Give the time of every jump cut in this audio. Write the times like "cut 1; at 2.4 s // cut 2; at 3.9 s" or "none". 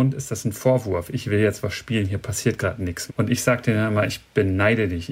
cut 1; at 3.1 s